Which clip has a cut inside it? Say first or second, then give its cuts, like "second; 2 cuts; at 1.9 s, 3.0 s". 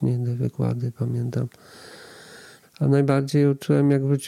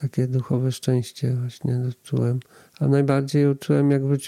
first; 1 cut; at 2.6 s